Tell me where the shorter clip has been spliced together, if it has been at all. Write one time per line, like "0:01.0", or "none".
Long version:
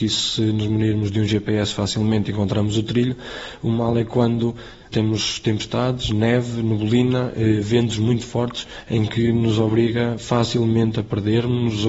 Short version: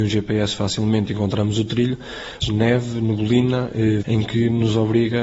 0:02.4
0:04.0

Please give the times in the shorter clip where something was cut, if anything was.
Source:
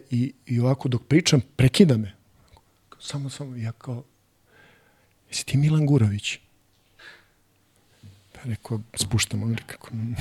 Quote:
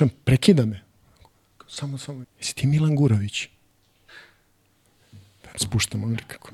0:02.2
0:05.5

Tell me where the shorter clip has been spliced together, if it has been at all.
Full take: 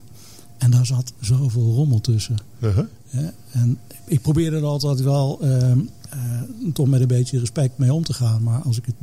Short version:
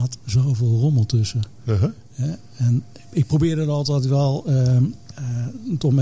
none

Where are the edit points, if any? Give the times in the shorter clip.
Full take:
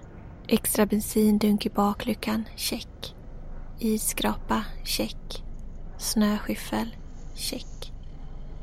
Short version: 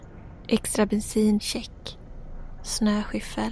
0:01.4
0:02.6

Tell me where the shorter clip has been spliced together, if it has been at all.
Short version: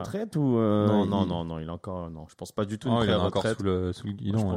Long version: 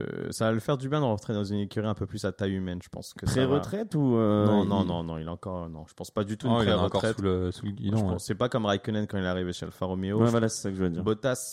none

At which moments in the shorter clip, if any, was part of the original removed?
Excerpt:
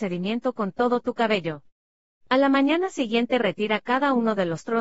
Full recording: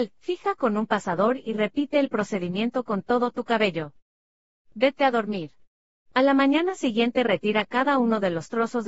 0:02.2

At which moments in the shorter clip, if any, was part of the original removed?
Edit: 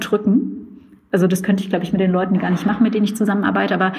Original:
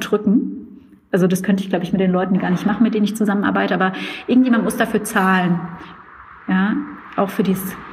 none

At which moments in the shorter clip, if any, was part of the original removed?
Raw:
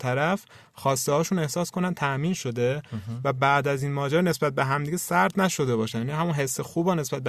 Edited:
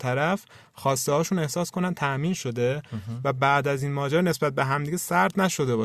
none

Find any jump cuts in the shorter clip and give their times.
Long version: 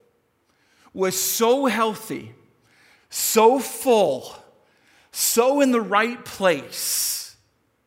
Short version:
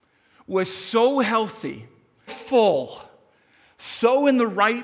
0:02.3

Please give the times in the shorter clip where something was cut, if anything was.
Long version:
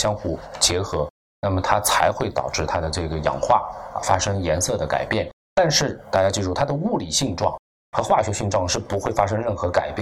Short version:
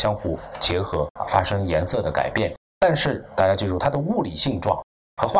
0:01.2

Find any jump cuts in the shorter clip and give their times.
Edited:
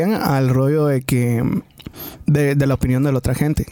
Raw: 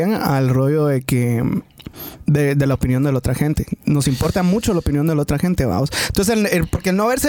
none

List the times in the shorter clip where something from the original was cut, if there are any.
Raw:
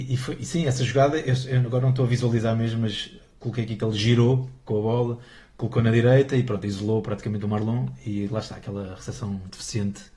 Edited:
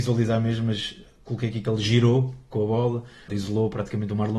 0:03.3

